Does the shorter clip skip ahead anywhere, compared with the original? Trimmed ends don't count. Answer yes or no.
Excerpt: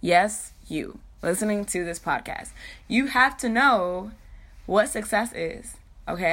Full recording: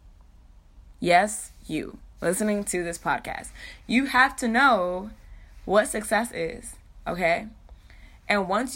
no